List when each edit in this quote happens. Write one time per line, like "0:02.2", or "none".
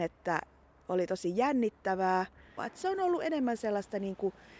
0:02.6